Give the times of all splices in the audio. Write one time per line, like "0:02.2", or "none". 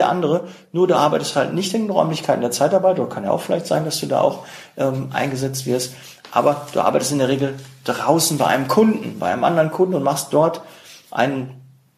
none